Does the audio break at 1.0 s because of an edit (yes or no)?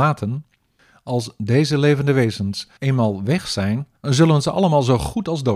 no